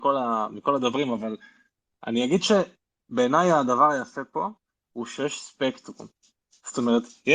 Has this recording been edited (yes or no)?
no